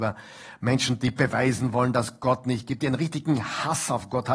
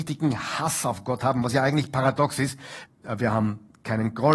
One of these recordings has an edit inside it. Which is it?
second; 1 cut; at 2.9 s

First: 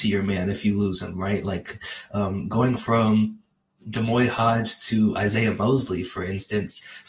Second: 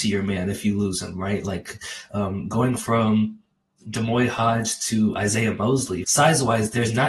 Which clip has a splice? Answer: second; 1 cut; at 6.0 s

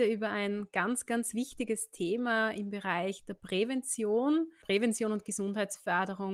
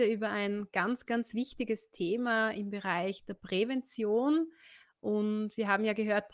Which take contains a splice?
first; 1 cut; at 4.6 s

